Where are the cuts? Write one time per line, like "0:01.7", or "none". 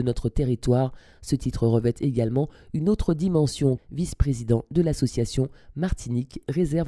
0:03.8